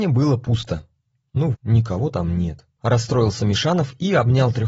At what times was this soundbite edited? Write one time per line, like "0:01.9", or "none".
0:01.5
0:02.8